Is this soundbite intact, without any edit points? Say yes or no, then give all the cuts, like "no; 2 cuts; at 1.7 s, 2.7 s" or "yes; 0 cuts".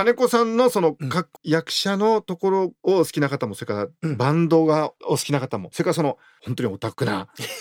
no; 1 cut; at 1.4 s